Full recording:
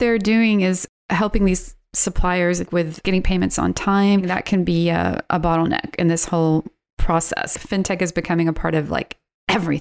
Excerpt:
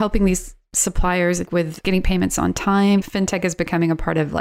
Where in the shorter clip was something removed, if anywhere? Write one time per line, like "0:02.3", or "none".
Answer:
0:03.0